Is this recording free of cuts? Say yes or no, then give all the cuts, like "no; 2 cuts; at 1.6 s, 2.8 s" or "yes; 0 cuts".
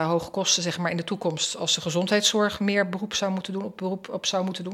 yes; 0 cuts